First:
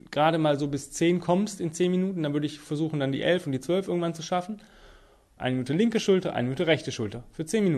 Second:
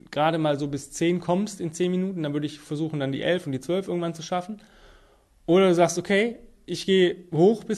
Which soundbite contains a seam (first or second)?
first